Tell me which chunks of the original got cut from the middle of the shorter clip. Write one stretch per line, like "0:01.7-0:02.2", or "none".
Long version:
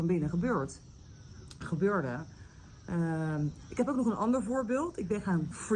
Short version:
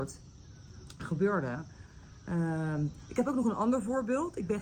none